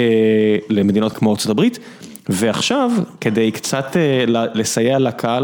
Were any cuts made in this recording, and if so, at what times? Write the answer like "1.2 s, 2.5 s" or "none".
1.1 s